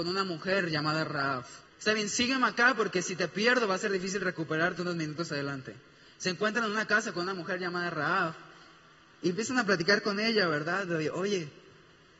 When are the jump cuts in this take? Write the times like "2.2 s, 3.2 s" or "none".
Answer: 1.7 s